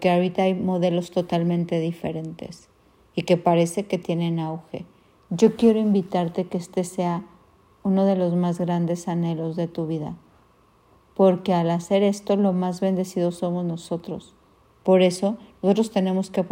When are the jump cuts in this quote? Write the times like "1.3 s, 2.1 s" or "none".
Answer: 5.2 s, 14.7 s